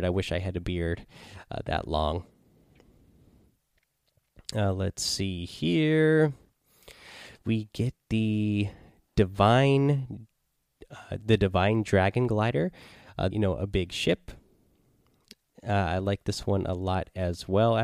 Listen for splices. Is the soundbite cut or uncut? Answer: cut